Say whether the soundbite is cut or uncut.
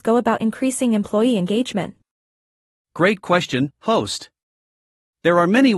uncut